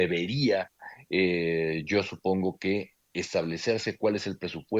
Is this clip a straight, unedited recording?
yes; 0 cuts

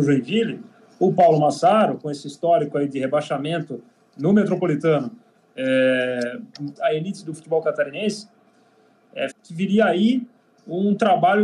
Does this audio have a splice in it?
yes; 2 cuts; at 6.8 s, 9.3 s

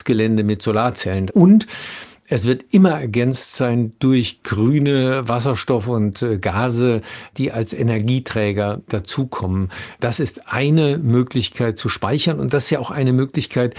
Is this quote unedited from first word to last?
no; 1 cut; at 1.3 s

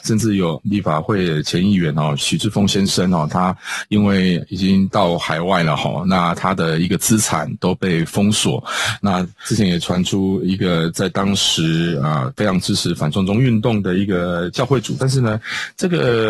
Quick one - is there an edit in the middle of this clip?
yes; 1 cut; at 15.0 s

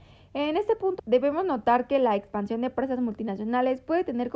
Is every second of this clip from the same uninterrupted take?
no; 1 cut; at 1.0 s

